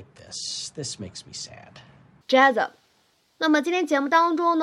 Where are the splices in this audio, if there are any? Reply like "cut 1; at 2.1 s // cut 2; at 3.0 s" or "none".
cut 1; at 2.2 s